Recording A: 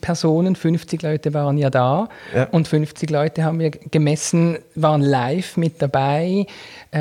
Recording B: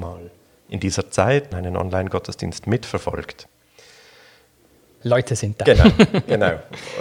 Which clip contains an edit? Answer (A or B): B